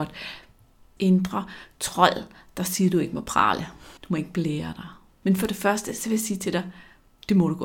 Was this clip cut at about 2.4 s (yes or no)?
no